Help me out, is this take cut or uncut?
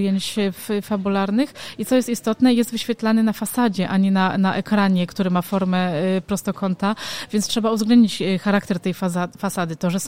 uncut